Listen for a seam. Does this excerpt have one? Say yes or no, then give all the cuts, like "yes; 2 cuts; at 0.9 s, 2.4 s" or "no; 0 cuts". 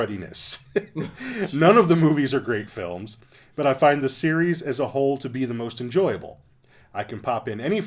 no; 0 cuts